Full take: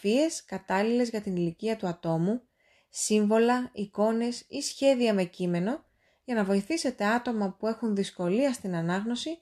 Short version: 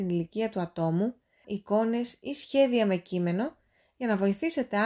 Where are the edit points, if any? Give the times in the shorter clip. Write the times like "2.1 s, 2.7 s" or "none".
1.4 s

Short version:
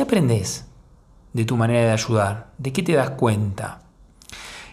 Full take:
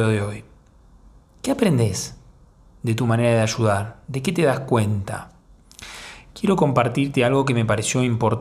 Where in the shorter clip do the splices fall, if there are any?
none

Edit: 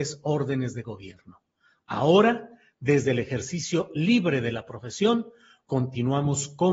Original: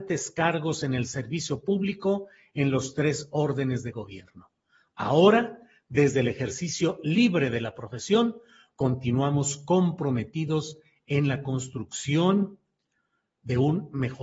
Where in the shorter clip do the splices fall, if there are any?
none

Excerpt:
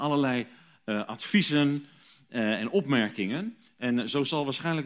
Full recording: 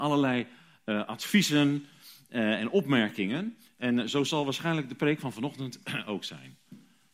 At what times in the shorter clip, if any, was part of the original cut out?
none

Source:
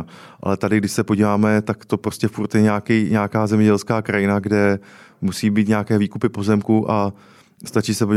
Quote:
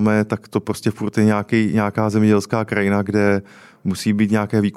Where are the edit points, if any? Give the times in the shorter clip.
none

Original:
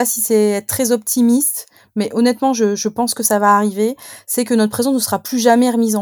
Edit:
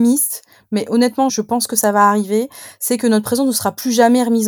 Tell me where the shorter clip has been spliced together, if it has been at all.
1.3 s

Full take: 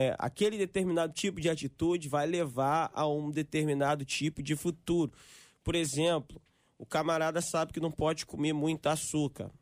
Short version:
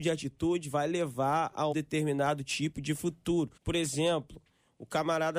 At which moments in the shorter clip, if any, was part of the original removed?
1.7 s, 3.6 s

